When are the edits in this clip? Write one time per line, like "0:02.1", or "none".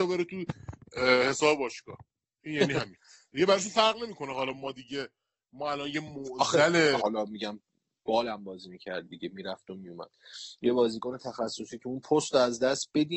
0:07.0

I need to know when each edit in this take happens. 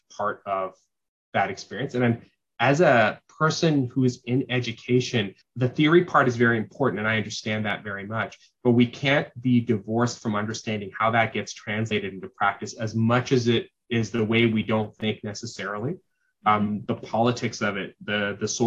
0:05.4
0:16.9

